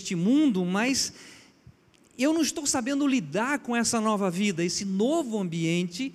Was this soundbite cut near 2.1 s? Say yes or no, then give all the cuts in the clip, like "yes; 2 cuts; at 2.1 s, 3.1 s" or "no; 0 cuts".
no; 1 cut; at 4.6 s